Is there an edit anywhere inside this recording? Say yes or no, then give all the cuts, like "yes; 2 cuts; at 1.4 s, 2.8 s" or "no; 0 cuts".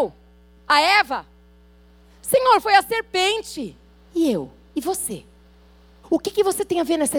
yes; 1 cut; at 6.0 s